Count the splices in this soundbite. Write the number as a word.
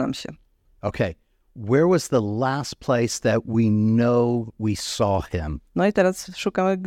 one